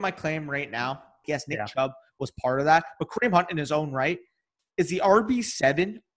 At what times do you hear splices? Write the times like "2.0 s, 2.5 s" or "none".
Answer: 1.2 s